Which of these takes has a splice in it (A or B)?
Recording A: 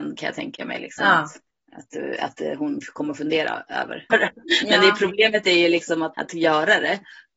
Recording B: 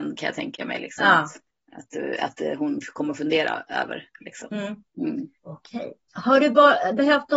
A